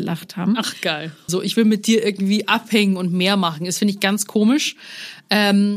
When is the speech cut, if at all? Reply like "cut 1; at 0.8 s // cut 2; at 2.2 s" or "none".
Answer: cut 1; at 1.3 s